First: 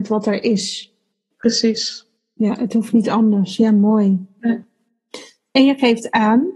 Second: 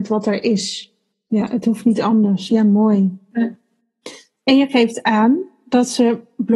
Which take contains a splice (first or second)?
second